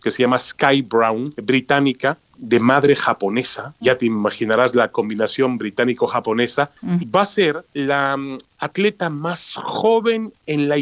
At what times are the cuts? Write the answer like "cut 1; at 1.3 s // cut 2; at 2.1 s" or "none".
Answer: cut 1; at 2.3 s // cut 2; at 7.0 s